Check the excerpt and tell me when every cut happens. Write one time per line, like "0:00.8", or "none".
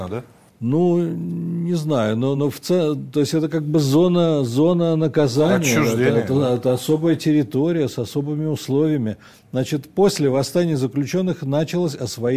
none